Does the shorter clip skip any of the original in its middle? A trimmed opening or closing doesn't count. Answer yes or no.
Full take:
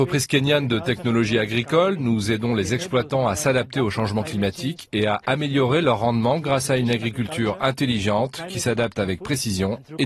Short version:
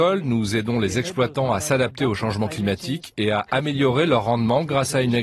no